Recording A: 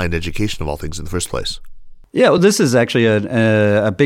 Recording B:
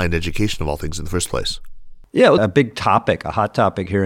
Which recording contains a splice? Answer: B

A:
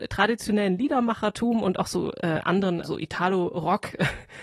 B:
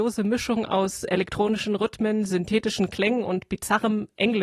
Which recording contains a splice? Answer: A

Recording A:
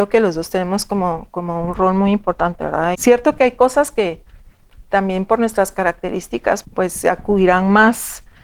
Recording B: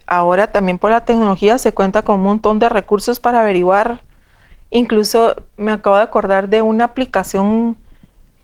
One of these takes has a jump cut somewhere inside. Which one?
A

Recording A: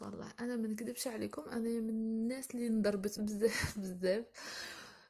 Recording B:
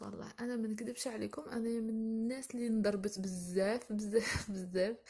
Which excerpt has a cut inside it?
A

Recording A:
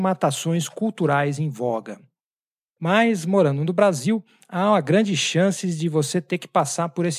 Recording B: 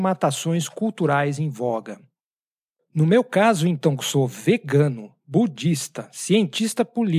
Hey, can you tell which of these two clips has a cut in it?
A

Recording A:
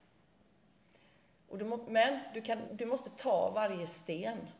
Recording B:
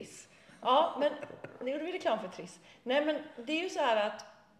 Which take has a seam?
A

